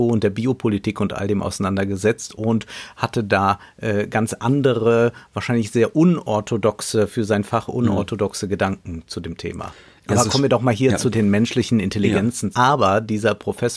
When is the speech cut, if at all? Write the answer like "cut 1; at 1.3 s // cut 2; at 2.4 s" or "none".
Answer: cut 1; at 11.1 s // cut 2; at 12.5 s